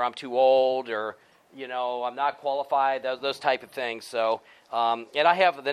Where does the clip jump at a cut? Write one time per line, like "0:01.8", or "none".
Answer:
none